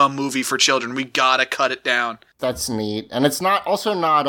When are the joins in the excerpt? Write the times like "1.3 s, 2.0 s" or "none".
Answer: 2.4 s